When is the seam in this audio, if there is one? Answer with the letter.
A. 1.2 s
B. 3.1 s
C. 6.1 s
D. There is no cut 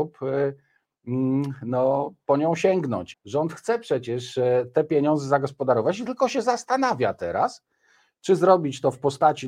B